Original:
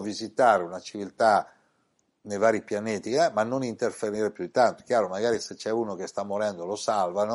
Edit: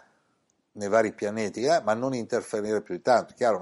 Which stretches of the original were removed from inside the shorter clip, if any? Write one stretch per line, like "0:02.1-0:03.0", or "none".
none